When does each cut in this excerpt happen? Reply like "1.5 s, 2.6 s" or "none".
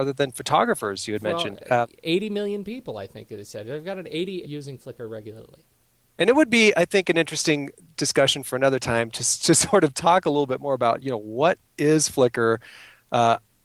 4.4 s